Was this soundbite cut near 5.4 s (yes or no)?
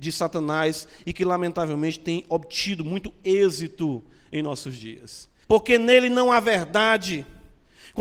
yes